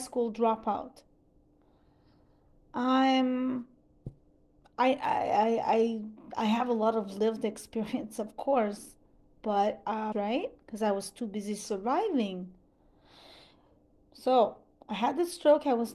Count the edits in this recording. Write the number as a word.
two